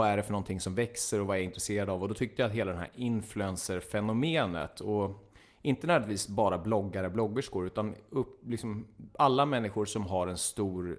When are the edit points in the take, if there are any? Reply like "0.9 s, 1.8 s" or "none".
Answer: none